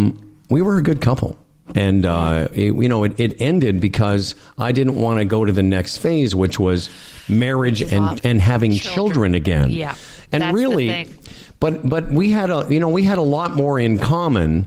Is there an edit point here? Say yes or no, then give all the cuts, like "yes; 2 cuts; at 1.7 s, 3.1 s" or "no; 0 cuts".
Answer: no; 0 cuts